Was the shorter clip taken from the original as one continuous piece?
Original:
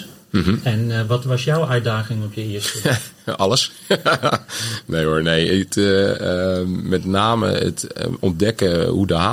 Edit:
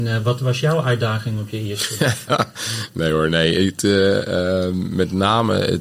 no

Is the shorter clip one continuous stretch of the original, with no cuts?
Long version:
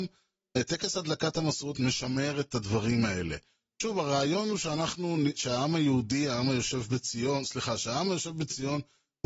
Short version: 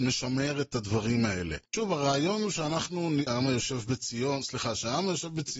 no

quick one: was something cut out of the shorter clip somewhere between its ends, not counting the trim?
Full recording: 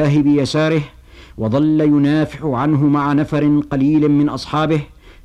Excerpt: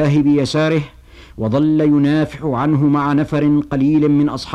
no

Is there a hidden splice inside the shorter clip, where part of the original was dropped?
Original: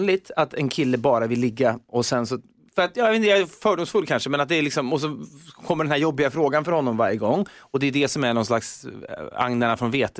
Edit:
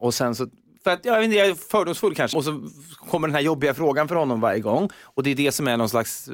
yes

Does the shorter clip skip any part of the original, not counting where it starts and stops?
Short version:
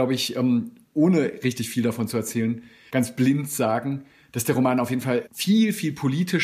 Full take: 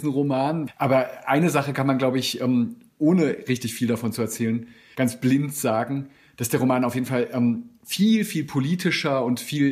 yes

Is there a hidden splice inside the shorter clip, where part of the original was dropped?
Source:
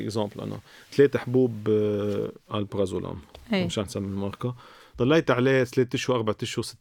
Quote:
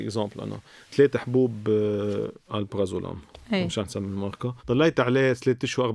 yes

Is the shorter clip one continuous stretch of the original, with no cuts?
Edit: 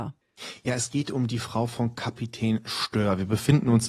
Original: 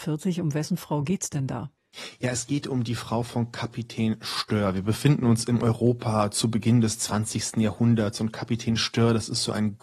yes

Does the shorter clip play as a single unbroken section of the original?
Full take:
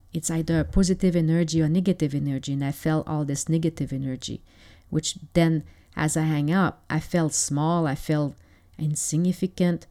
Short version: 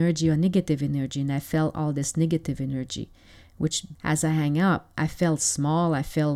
no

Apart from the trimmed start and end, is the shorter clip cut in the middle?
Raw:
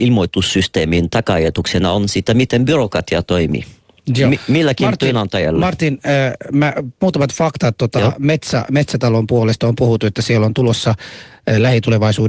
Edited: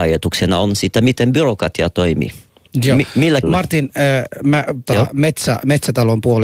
yes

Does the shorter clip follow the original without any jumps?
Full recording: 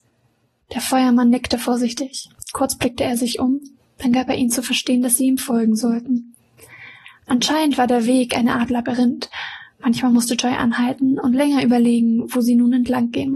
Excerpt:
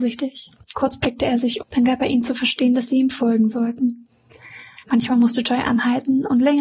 no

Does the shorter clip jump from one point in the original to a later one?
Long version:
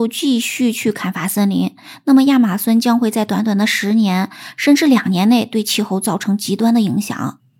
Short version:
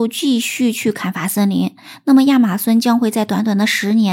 no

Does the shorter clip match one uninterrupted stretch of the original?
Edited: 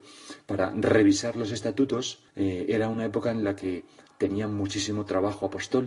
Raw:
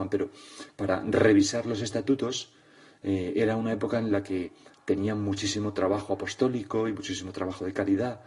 no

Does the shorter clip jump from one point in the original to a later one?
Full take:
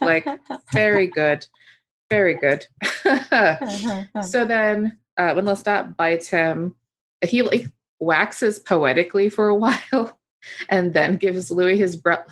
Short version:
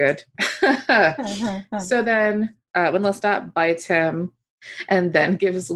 yes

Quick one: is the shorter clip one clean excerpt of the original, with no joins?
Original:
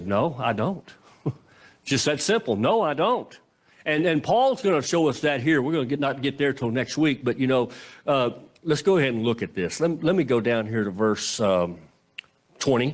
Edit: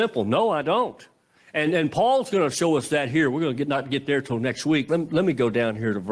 no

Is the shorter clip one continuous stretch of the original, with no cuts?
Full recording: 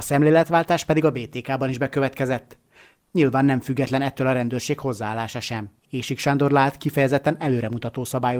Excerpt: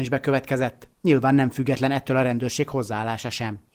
no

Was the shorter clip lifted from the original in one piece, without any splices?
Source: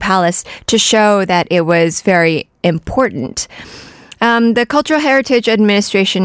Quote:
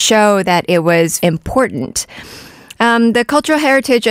no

